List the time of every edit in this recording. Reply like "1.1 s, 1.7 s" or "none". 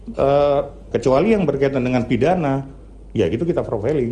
0.9 s

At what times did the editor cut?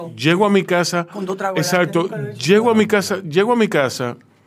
none

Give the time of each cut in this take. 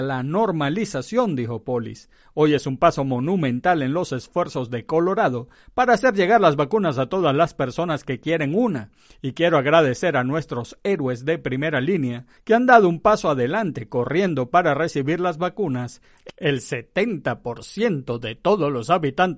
12.4 s

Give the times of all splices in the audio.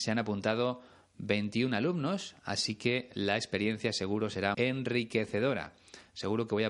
4.5 s

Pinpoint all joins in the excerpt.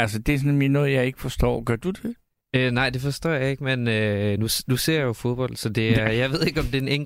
none

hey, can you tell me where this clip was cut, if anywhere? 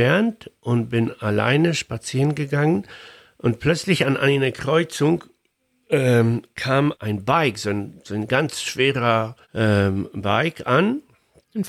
6.9 s, 9.4 s

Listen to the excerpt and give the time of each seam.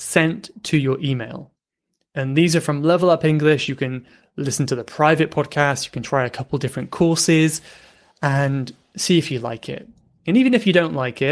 none

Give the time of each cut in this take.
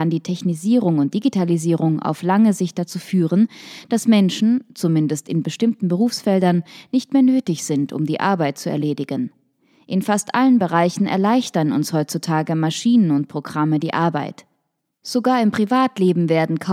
none

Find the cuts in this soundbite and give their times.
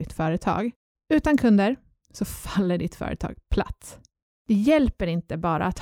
0.9 s, 4.4 s

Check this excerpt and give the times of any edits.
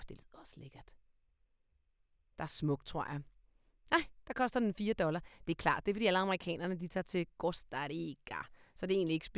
none

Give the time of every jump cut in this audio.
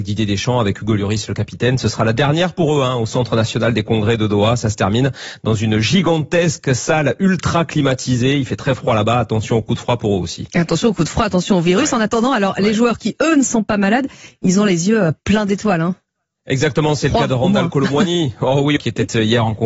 18.8 s

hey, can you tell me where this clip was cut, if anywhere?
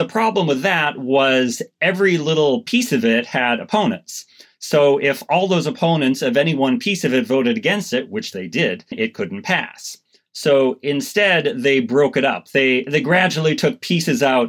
8.9 s

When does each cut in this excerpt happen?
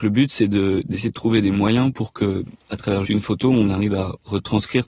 3.0 s

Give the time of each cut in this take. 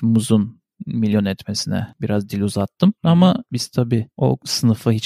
none

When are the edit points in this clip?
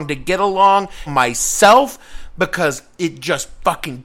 1.1 s

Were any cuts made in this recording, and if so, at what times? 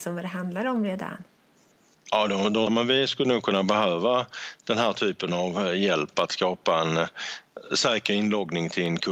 2.7 s

